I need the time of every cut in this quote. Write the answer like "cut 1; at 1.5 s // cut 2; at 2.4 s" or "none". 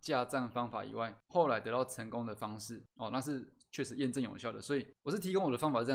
none